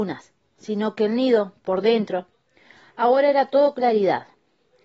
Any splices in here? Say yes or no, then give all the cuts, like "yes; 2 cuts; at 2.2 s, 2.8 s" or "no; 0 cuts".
no; 0 cuts